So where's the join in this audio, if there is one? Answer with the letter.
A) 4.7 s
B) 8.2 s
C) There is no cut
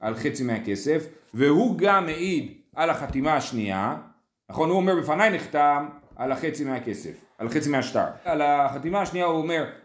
B